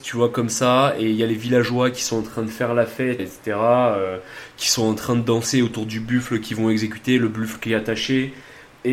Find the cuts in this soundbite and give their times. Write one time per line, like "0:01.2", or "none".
0:03.2